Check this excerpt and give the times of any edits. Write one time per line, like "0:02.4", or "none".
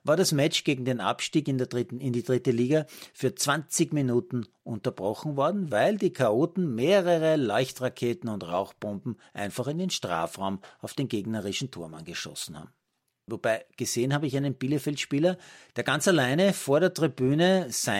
0:13.3